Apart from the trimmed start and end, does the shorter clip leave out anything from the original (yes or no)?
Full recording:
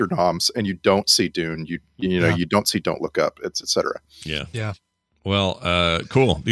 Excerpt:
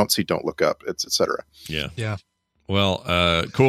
no